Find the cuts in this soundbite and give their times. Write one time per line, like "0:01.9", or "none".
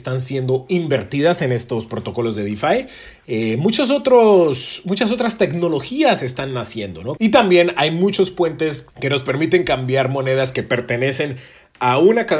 0:07.2
0:08.9